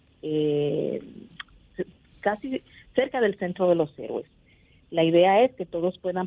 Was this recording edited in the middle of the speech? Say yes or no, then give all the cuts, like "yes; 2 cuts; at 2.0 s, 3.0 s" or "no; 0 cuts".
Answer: no; 0 cuts